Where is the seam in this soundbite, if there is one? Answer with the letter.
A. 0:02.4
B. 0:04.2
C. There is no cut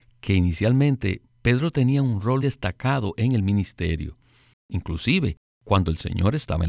A